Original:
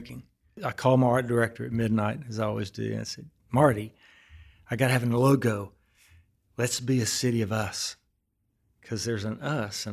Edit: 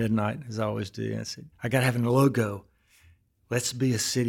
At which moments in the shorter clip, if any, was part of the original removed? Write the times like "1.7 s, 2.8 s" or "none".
1.5 s